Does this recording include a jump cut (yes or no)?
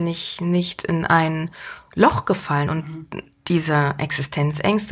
yes